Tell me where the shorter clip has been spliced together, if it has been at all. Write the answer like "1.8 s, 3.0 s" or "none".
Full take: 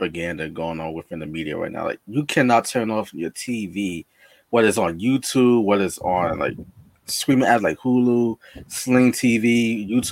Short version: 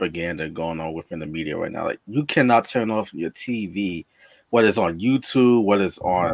none